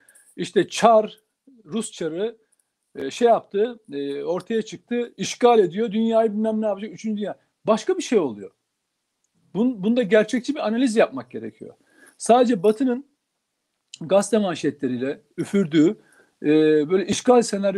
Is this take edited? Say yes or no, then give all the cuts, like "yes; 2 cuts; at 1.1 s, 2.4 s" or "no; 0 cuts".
no; 0 cuts